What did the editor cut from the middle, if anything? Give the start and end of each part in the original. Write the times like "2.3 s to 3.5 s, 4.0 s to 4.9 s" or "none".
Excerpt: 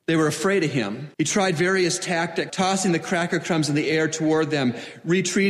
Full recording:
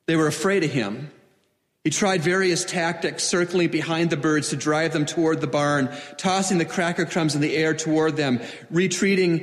1.1 s to 1.8 s, 3.2 s to 6.2 s